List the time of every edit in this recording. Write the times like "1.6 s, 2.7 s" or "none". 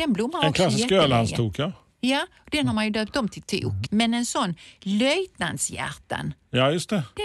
3.9 s